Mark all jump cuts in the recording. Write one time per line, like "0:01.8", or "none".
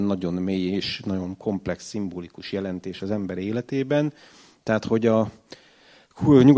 none